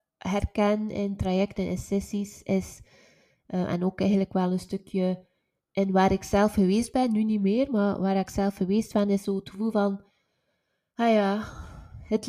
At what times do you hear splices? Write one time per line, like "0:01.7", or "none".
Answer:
none